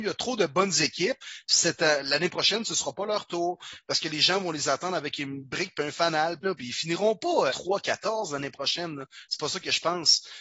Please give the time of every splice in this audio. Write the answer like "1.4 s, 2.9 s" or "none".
6.4 s, 7.5 s